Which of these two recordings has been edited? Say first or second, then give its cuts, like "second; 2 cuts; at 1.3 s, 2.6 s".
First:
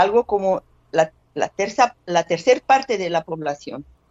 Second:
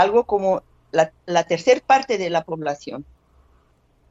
second; 1 cut; at 1.2 s